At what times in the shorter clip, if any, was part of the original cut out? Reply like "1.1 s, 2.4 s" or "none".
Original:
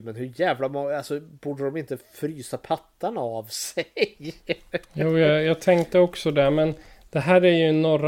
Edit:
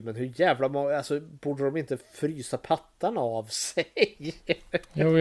none